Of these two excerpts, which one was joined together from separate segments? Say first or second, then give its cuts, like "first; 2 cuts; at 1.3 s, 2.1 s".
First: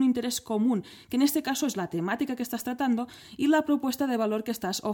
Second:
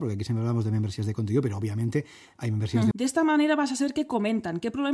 second; 1 cut; at 2.9 s